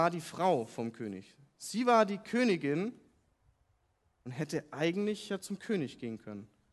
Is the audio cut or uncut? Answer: uncut